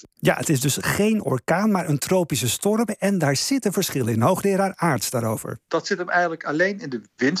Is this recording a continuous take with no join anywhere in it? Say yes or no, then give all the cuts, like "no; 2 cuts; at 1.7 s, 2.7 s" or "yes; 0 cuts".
yes; 0 cuts